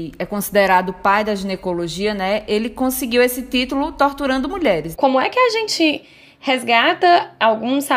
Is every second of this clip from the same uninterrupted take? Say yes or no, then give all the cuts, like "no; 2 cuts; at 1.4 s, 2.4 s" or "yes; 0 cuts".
no; 1 cut; at 4.9 s